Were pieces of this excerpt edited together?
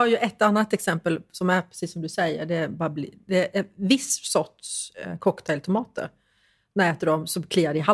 no; 0 cuts

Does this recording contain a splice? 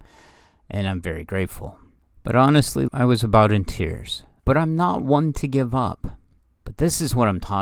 yes; 3 cuts; at 2.9 s, 4.4 s, 6.4 s

